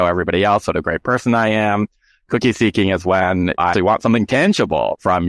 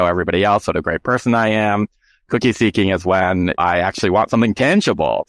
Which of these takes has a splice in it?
first; 1 cut; at 3.7 s

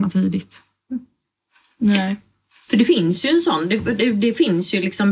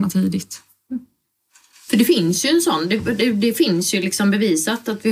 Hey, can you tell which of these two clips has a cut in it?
second; 1 cut; at 1.7 s

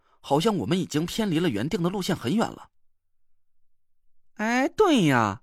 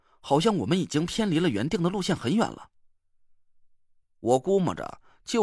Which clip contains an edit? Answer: second; 1 cut; at 4.0 s

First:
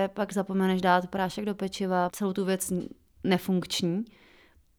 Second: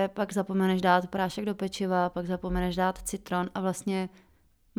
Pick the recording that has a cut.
first; 1 cut; at 2.1 s

